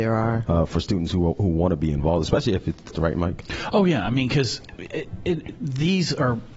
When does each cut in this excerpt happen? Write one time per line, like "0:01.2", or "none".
0:02.9